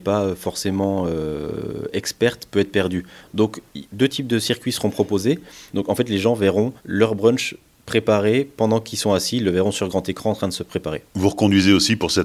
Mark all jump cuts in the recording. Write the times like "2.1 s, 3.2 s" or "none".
5.7 s, 6.8 s